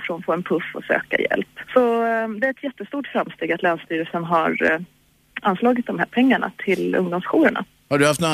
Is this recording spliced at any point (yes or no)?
yes